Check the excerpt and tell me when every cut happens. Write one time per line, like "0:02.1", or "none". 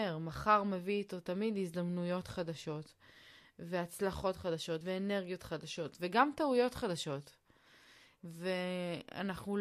none